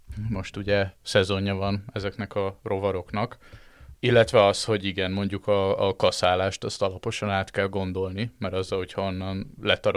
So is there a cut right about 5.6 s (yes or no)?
no